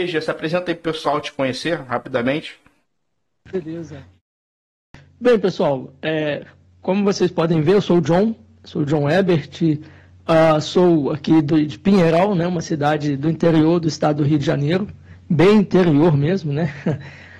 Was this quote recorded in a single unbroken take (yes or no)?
yes